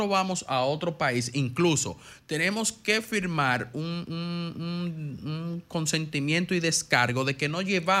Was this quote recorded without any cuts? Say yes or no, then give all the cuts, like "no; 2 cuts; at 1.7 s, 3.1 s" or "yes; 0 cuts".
yes; 0 cuts